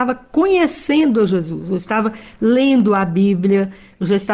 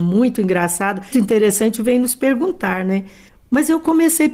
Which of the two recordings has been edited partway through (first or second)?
second